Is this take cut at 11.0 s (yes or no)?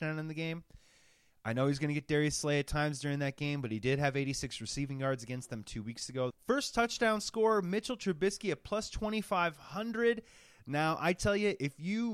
no